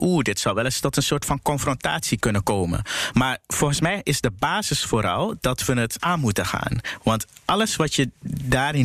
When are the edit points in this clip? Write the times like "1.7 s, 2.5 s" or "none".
none